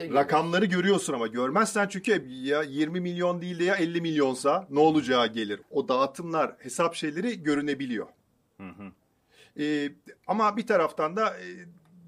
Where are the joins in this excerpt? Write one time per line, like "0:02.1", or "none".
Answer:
0:02.2
0:05.6

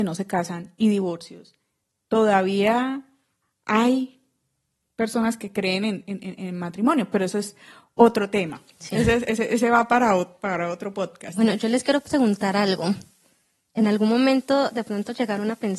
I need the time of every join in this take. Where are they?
none

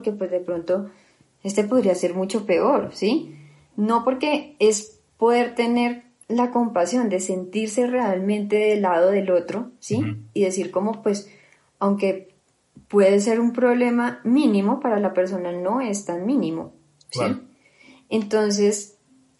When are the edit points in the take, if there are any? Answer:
none

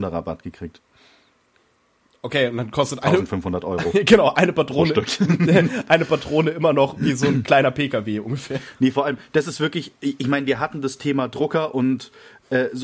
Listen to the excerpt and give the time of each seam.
none

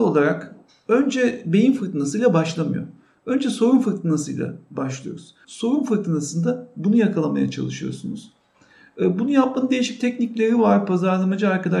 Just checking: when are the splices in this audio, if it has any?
0:05.4

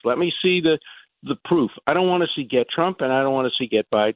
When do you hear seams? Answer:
none

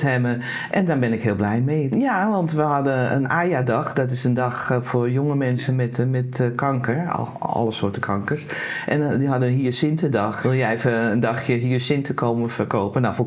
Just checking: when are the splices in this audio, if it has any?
0:01.9
0:03.2
0:10.4

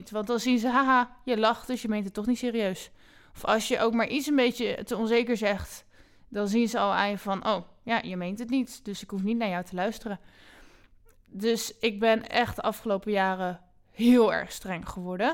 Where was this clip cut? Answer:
none

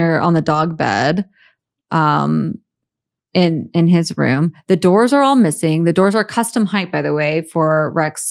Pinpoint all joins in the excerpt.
none

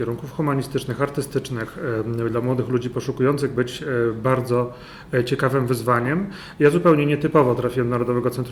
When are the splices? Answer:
none

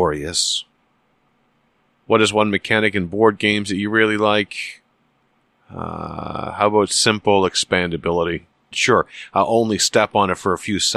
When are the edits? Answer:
0:08.7

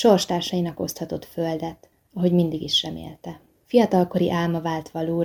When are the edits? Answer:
none

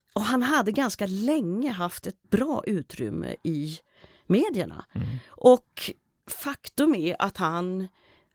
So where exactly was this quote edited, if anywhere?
0:02.2

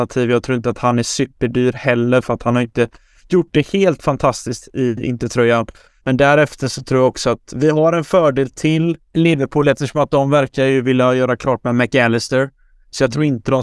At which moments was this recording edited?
0:06.0
0:09.1

